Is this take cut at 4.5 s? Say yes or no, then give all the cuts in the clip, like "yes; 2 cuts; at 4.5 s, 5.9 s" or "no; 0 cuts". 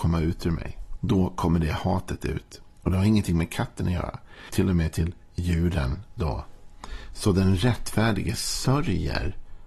yes; 2 cuts; at 1.0 s, 4.5 s